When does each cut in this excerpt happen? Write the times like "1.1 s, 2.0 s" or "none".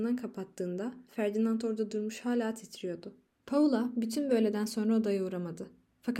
3.3 s